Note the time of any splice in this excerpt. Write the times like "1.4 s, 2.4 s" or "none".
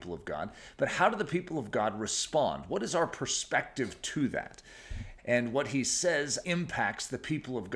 5.2 s, 6.4 s

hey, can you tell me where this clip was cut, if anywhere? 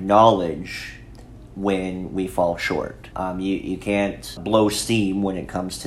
3.1 s, 4.4 s

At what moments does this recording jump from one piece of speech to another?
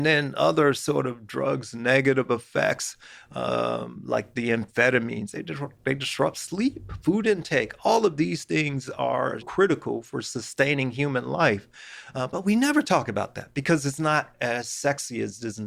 5.3 s, 9.4 s

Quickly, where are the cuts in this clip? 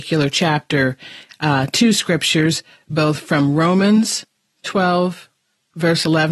none

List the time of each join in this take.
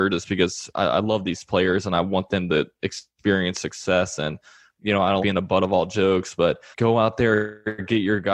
5.2 s, 6.7 s

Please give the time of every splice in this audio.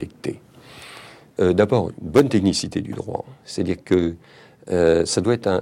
1.4 s

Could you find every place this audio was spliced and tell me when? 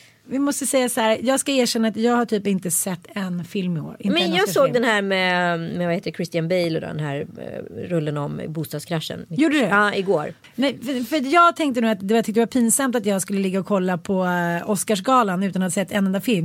none

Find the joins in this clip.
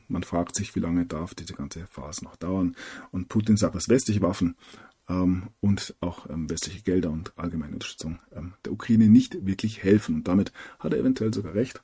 none

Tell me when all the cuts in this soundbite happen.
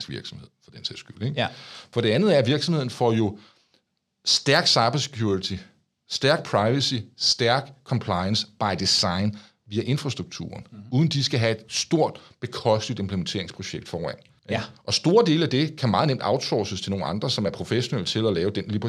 14.4 s

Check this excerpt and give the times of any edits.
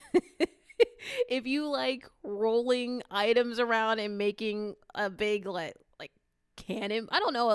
none

